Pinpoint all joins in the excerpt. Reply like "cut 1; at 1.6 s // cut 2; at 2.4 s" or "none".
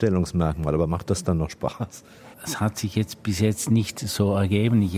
cut 1; at 2.3 s